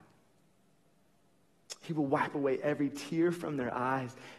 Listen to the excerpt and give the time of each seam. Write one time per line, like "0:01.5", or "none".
none